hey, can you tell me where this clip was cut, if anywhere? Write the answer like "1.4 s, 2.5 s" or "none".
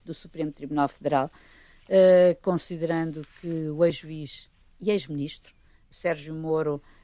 none